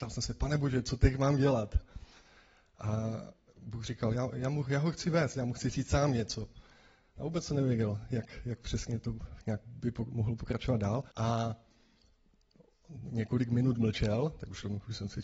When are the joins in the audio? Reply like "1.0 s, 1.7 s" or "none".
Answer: 7.2 s, 11.1 s